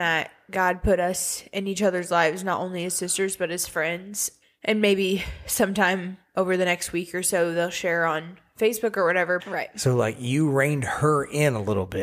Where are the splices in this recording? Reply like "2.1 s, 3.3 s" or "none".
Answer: 9.4 s